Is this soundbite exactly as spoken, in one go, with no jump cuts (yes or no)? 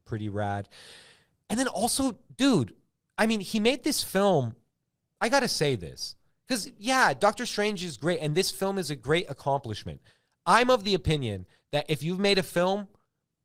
yes